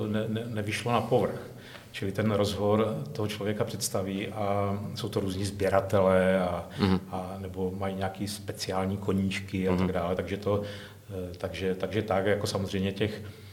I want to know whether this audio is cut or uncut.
uncut